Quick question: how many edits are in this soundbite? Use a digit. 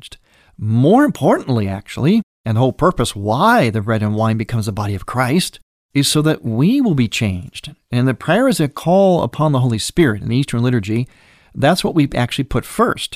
0